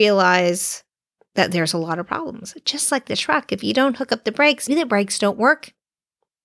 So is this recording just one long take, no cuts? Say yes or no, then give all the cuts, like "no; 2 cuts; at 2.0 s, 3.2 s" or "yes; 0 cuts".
no; 1 cut; at 4.7 s